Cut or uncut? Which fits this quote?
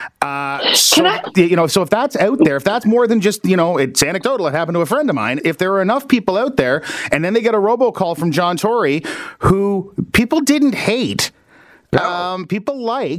cut